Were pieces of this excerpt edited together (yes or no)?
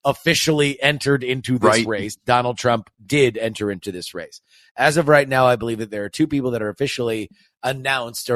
no